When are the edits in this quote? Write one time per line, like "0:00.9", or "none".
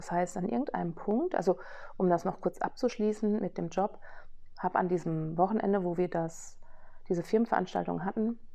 0:04.5

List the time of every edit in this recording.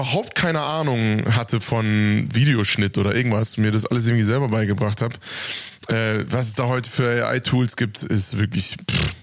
none

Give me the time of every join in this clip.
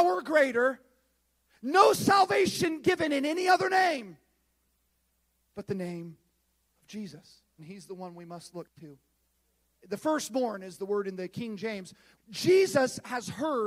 0:07.6
0:09.8
0:12.2

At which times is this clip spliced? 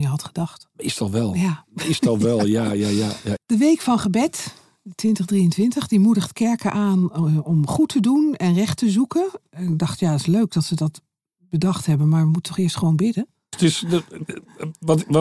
0:03.4
0:13.5

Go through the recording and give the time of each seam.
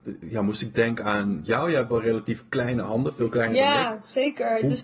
none

